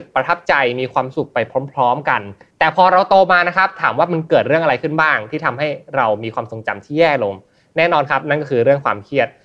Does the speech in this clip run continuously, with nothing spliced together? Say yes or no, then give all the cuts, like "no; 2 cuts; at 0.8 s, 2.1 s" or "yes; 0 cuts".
yes; 0 cuts